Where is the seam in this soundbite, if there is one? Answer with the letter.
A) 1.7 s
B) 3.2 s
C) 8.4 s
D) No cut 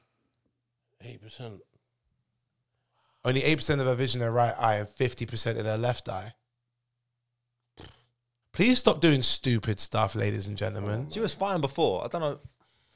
C